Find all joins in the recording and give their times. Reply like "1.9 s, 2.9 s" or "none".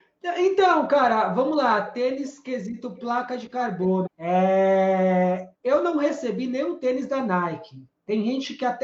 4.1 s, 5.5 s

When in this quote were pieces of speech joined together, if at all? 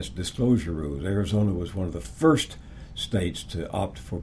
none

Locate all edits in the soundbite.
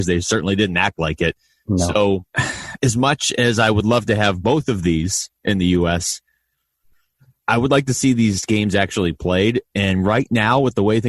2.3 s

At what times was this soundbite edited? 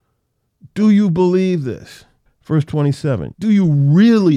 2.3 s, 3.3 s

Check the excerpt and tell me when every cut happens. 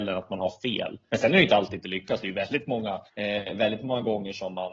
1.1 s, 3.1 s

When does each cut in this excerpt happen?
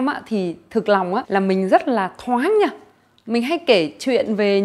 1.2 s

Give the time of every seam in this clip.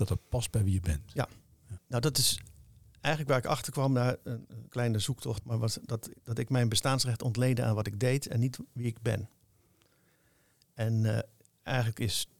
1.8 s, 5.4 s

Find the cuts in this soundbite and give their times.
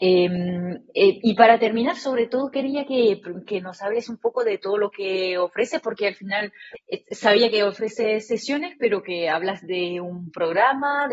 none

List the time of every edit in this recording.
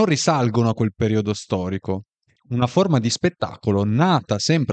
2.4 s

